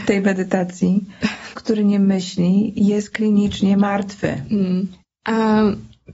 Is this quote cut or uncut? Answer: cut